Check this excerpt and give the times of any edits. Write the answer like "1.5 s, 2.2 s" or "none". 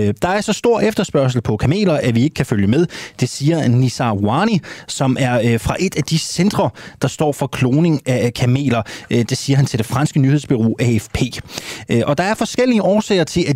none